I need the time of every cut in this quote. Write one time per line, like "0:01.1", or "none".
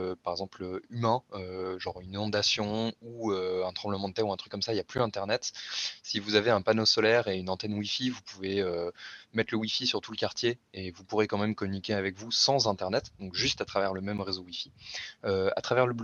none

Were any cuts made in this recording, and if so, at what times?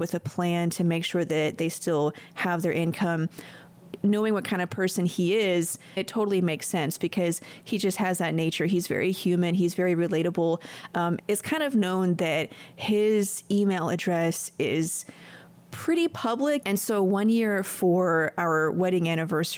0:11.2
0:16.6

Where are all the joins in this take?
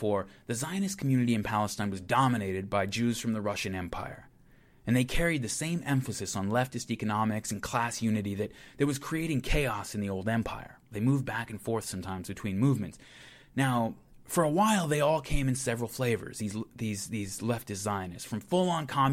0:10.9

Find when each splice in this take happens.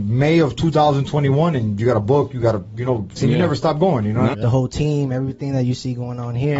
0:03.2
0:04.3

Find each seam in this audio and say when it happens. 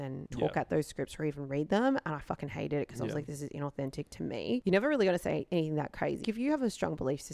0:06.2

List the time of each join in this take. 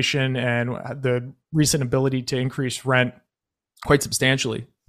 none

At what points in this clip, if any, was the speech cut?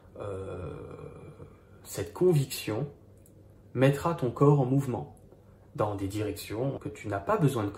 0:06.8

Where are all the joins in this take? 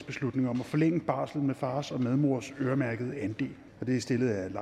0:03.7

